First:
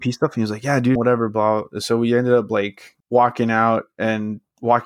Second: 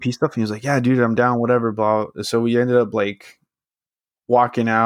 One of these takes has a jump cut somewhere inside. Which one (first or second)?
first